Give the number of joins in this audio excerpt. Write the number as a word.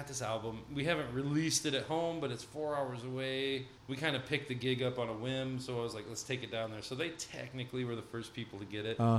one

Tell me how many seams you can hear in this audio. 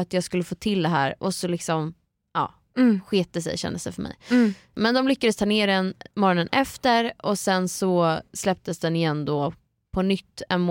zero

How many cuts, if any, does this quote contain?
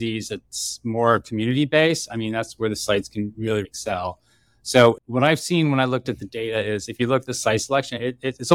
zero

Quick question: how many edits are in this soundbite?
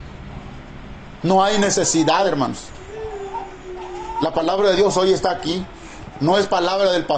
one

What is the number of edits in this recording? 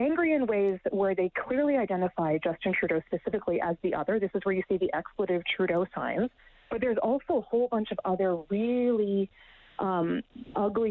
zero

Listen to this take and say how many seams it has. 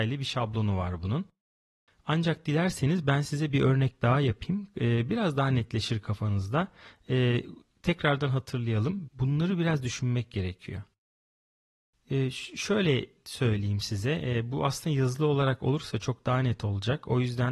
one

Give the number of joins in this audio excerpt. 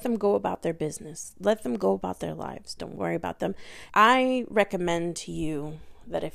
two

